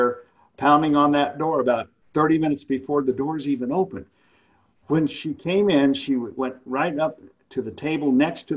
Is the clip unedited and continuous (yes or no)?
yes